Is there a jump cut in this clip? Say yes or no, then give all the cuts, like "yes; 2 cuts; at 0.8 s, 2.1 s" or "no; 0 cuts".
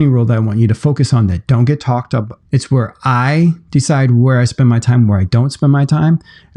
yes; 1 cut; at 2.4 s